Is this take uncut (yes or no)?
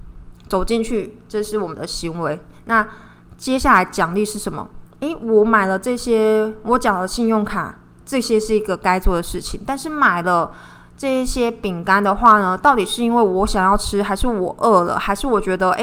yes